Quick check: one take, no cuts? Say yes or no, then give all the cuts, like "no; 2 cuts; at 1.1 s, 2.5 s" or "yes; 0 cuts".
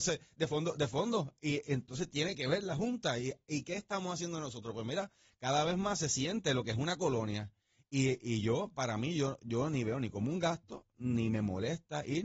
yes; 0 cuts